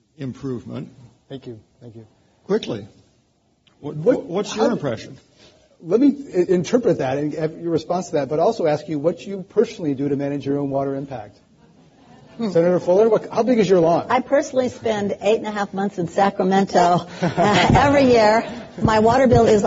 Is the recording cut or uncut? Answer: uncut